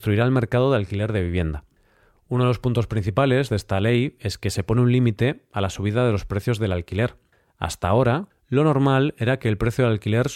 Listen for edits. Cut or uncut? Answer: cut